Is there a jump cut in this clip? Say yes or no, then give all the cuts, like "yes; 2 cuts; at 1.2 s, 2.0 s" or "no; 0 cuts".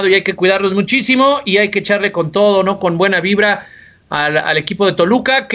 no; 0 cuts